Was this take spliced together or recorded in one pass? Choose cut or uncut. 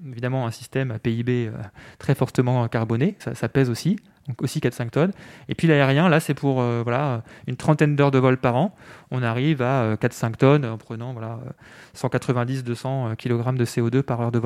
cut